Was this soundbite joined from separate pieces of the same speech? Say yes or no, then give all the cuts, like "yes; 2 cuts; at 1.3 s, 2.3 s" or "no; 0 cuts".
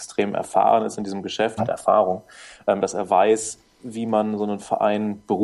yes; 2 cuts; at 1.6 s, 2.8 s